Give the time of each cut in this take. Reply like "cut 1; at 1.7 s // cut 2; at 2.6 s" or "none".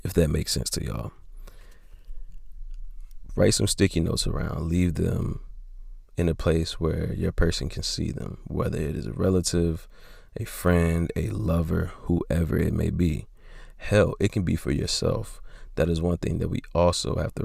cut 1; at 3.3 s